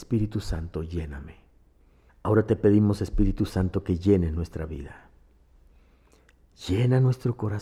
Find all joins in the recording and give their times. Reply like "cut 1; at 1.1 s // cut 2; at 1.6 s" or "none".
cut 1; at 2.1 s